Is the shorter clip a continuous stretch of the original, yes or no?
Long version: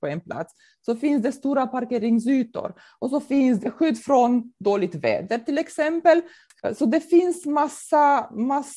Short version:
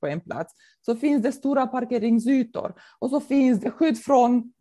yes